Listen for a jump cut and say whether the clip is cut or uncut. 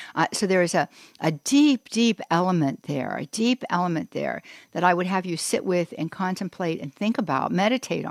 uncut